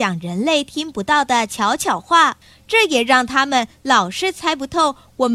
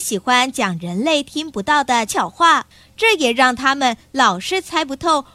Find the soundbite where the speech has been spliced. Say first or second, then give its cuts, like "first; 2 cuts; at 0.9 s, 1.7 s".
second; 1 cut; at 2.1 s